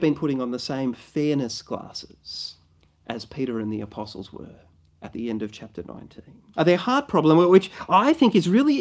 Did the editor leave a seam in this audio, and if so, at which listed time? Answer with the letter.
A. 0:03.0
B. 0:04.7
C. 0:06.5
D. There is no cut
C